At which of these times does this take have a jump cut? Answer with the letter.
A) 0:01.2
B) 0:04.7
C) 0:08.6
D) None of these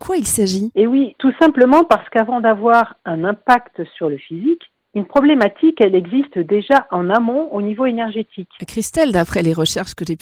C